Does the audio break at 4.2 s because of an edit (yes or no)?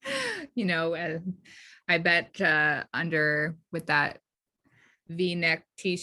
no